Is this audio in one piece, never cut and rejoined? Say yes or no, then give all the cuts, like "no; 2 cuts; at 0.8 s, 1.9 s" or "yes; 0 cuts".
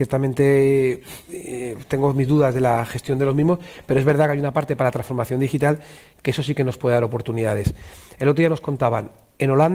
yes; 0 cuts